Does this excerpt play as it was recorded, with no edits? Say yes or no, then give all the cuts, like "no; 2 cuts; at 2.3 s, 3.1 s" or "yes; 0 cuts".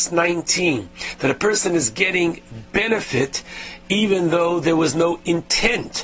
yes; 0 cuts